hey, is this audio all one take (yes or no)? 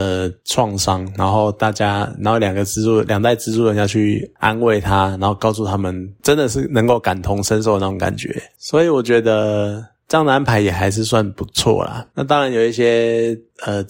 yes